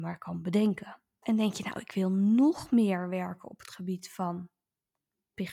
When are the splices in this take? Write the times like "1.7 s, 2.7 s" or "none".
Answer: 1.2 s